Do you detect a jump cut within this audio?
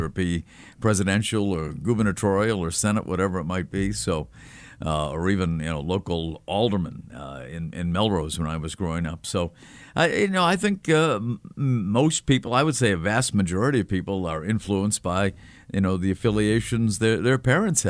no; 0 cuts

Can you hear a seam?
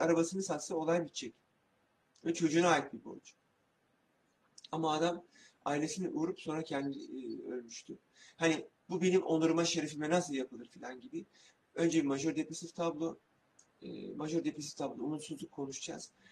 no; 0 cuts

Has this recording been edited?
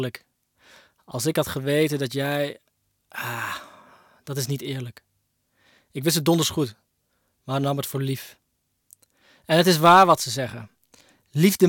no; 0 cuts

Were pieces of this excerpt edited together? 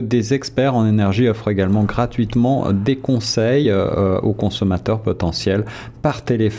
no; 0 cuts

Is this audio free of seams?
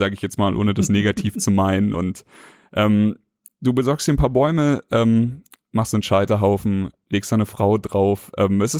yes; 0 cuts

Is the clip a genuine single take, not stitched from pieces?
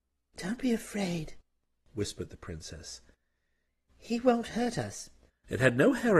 no; 1 cut; at 5.3 s

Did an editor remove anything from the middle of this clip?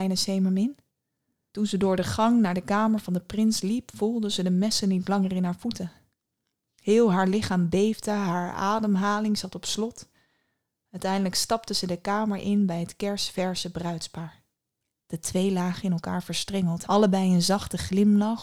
yes; 3 cuts; at 1.4 s, 14.9 s, 16.8 s

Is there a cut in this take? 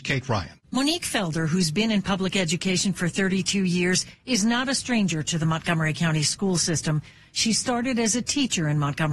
no; 0 cuts

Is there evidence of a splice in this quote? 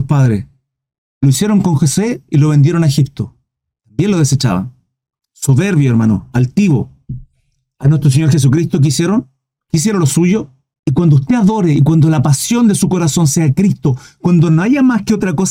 yes; 3 cuts; at 1.0 s, 3.8 s, 10.7 s

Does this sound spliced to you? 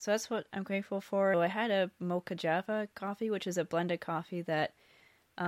yes; 2 cuts; at 1.3 s, 2.9 s

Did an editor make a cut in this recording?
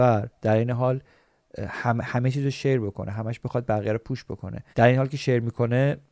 yes; 1 cut; at 4.7 s

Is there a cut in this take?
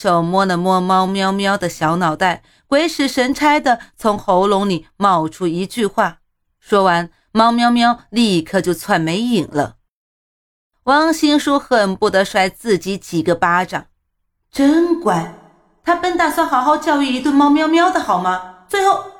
yes; 1 cut; at 6.5 s

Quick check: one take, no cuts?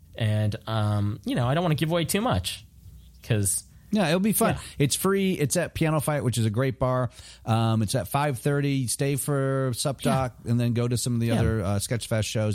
yes; 0 cuts

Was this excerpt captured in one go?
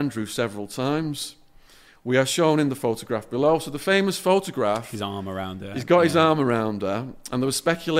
yes; 0 cuts

